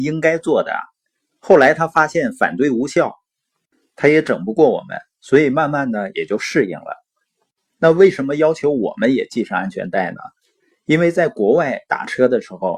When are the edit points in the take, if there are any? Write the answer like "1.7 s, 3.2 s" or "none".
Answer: none